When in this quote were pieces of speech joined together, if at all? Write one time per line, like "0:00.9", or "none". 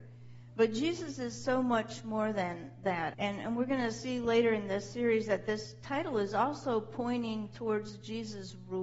0:03.1